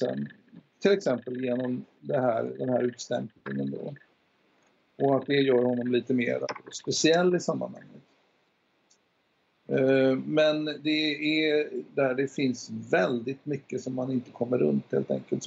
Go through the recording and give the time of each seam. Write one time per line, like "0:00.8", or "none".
0:11.9